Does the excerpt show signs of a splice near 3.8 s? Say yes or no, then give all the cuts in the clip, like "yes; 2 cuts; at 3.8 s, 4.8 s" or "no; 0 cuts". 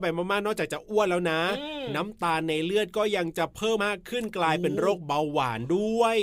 yes; 1 cut; at 3.8 s